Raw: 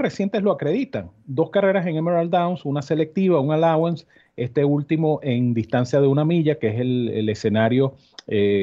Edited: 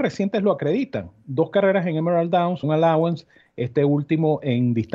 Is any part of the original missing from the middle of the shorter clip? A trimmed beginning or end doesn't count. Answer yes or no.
yes